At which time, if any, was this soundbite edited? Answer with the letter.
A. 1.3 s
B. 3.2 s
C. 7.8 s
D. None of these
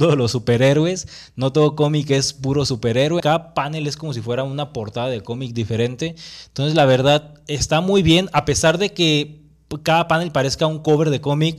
B